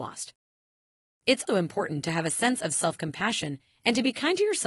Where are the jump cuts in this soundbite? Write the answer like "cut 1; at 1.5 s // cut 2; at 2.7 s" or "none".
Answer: cut 1; at 1.5 s